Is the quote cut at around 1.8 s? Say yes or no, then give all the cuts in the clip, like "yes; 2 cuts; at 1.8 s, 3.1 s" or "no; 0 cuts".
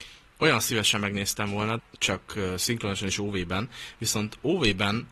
yes; 1 cut; at 1.8 s